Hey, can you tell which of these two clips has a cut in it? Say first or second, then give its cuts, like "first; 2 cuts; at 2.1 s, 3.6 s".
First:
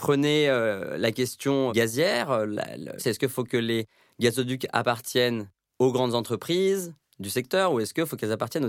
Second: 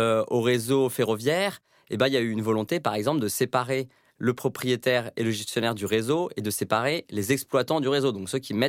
first; 2 cuts; at 1.7 s, 3.0 s